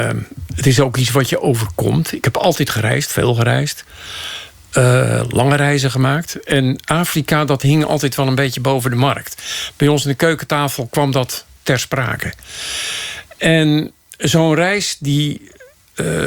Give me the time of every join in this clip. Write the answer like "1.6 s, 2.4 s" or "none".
none